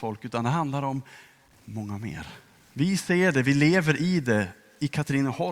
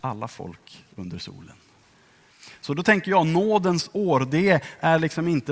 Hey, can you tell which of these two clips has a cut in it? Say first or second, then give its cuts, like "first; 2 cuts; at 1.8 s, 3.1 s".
first; 1 cut; at 2.7 s